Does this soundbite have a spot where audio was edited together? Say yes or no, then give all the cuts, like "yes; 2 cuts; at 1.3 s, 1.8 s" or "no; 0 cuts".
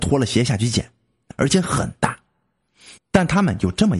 yes; 2 cuts; at 1.3 s, 3.0 s